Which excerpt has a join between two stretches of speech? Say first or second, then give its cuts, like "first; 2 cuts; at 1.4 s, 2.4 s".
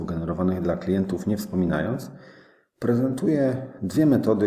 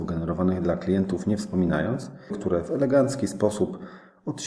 second; 1 cut; at 2.3 s